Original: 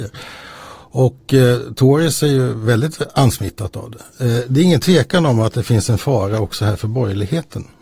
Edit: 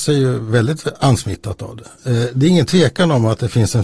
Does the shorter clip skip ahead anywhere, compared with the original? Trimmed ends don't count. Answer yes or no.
no